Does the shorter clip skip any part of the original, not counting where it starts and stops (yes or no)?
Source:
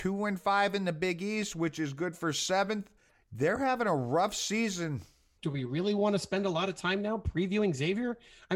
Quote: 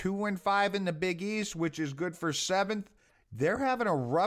no